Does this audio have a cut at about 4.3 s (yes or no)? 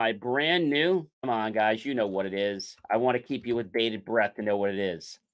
no